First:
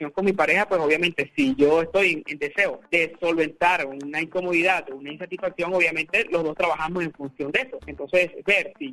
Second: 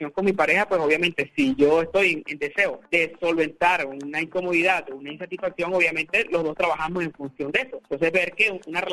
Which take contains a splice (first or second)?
first